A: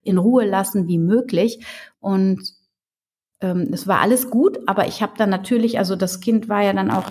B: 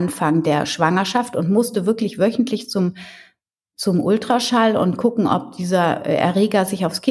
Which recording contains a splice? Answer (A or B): A